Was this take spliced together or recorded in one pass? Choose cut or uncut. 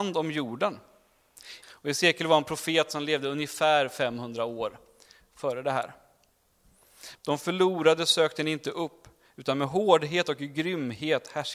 cut